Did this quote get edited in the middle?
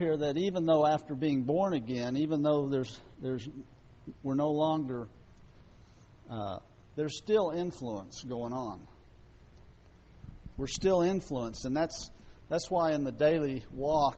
yes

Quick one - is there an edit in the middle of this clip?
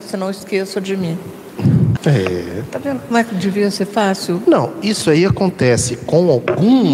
yes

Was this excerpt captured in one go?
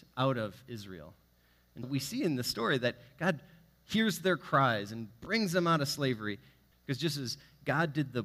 no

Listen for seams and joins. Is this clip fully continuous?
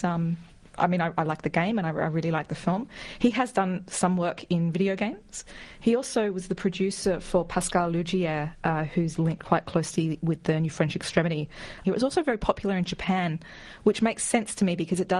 no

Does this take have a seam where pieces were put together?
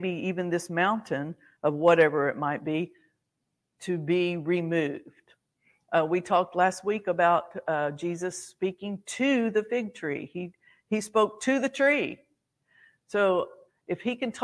no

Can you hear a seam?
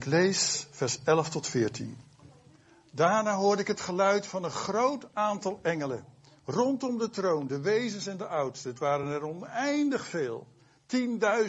no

